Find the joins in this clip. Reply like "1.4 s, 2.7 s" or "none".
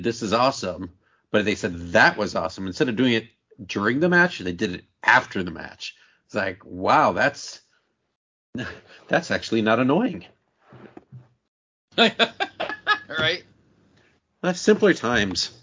none